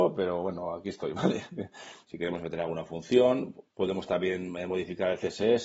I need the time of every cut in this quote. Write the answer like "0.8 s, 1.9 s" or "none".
2.0 s, 3.7 s